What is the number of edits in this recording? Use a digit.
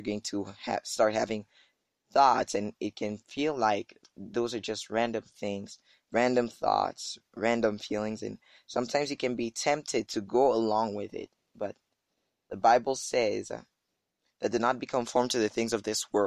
0